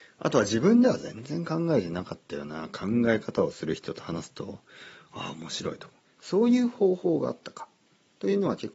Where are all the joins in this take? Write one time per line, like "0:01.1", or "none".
0:06.1